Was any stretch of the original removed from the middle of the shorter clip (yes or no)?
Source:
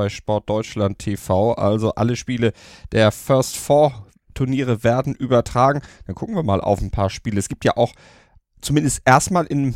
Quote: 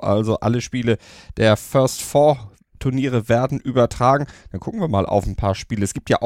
no